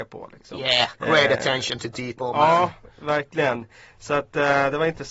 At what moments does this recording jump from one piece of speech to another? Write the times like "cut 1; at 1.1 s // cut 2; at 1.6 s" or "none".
cut 1; at 2.2 s